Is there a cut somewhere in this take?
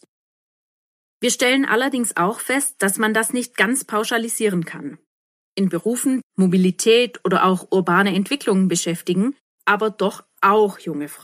yes; 2 cuts; at 6.2 s, 9.6 s

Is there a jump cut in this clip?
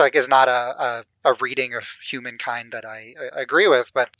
no; 0 cuts

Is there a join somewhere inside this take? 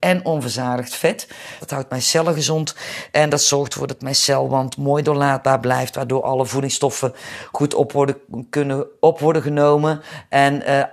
yes; 1 cut; at 1.6 s

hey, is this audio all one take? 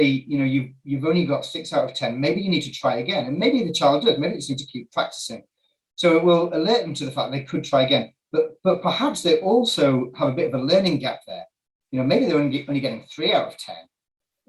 yes; 0 cuts

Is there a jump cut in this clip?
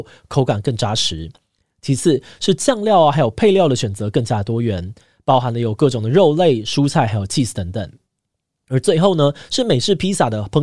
no; 0 cuts

